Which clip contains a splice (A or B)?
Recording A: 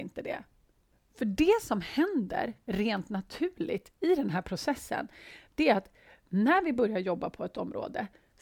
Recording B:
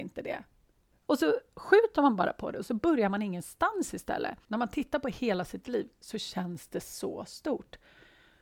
B